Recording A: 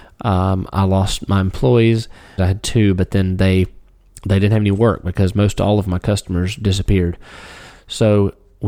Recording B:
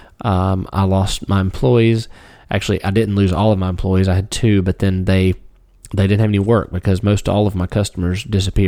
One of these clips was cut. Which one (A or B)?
A